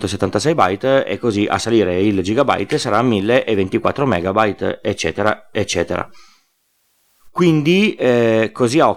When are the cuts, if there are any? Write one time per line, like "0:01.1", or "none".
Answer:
none